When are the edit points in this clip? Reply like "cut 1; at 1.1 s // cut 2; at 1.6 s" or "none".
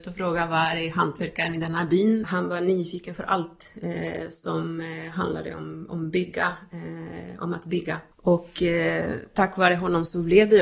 cut 1; at 2.2 s // cut 2; at 8.1 s